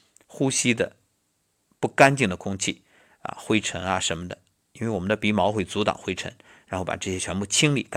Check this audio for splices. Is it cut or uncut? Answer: uncut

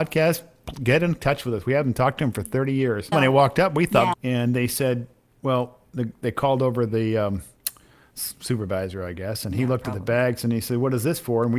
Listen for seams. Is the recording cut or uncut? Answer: cut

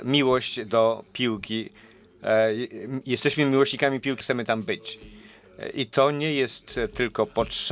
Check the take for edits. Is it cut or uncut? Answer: cut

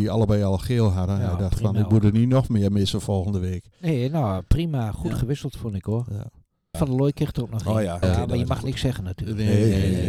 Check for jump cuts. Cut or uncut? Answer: cut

